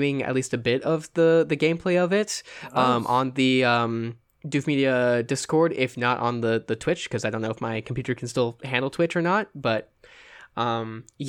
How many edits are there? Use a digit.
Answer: 0